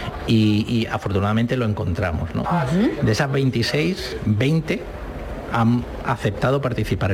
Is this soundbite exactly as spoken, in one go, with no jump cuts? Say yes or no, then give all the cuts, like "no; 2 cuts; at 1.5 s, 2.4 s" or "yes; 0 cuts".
no; 1 cut; at 2.4 s